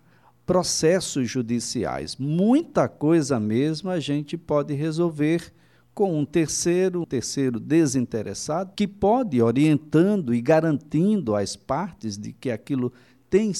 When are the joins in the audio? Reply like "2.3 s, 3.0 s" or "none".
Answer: 7.0 s, 8.8 s